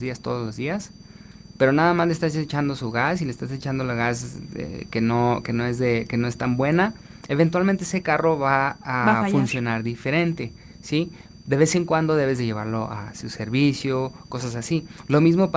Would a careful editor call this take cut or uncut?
uncut